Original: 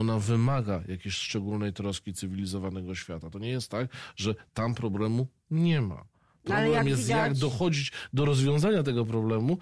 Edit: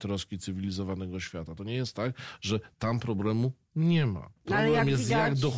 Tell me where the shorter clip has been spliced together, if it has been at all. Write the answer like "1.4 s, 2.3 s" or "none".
4.4 s